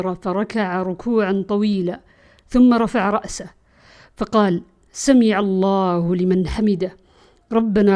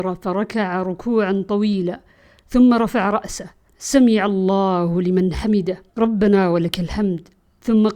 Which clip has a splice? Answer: second; 2 cuts; at 3.7 s, 5.9 s

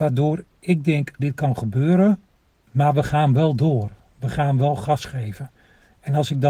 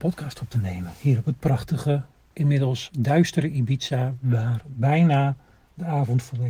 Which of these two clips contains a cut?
first; 1 cut; at 1.2 s

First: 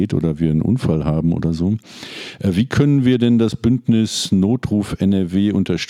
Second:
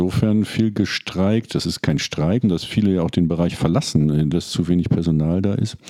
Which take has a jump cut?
second; 2 cuts; at 2.4 s, 4.3 s

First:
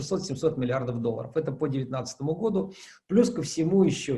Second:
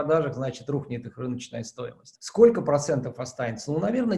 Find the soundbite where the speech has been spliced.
second; 1 cut; at 2.1 s

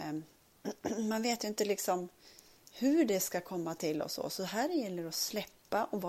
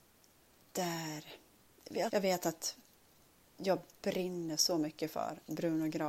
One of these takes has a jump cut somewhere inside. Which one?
second; 1 cut; at 2.1 s

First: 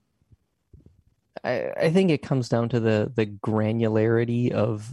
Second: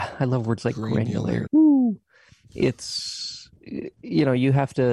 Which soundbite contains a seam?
second; 1 cut; at 1.5 s

